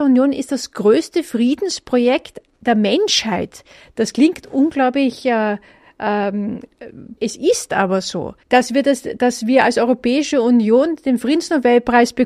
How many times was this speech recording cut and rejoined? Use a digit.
2